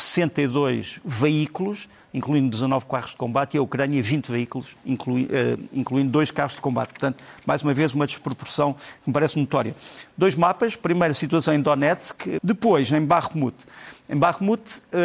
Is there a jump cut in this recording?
yes; 1 cut; at 12.4 s

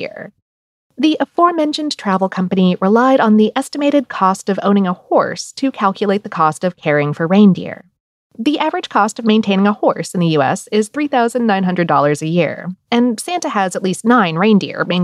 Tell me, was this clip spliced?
no; 0 cuts

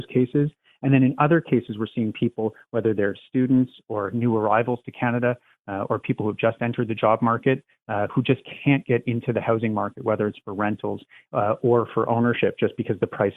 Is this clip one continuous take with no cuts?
yes; 0 cuts

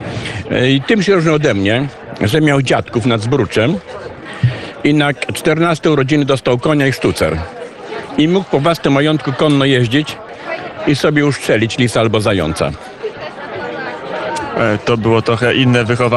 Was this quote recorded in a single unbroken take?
yes; 0 cuts

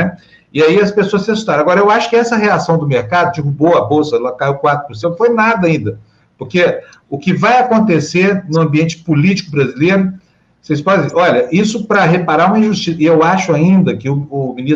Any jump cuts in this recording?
yes; 1 cut; at 5.0 s

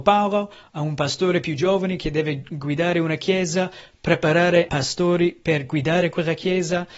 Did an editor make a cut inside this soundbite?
yes; 1 cut; at 4.7 s

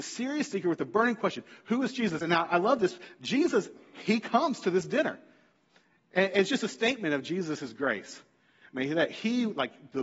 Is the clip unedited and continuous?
yes; 0 cuts

